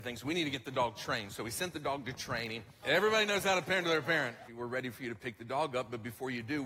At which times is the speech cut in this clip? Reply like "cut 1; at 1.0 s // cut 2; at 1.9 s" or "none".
cut 1; at 2.8 s // cut 2; at 4.5 s